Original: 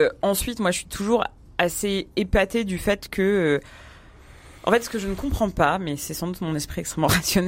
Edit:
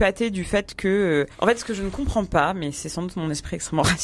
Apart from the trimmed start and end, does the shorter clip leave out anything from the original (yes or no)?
yes